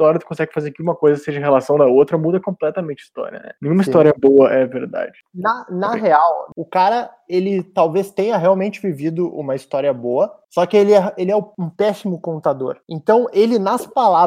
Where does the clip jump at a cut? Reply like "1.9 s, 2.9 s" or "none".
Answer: none